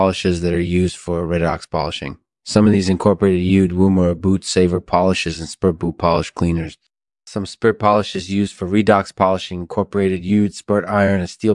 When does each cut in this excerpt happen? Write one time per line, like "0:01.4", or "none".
0:07.1